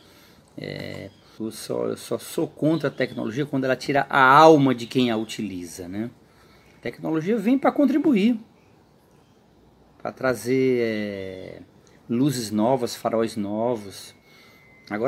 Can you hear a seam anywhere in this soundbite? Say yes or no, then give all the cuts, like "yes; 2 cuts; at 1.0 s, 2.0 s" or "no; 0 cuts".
yes; 1 cut; at 1.4 s